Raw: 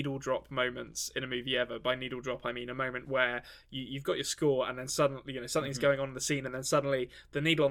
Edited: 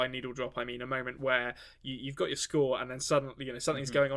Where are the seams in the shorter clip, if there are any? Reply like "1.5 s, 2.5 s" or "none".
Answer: none